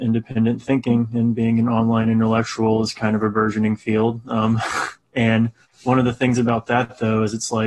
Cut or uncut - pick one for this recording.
uncut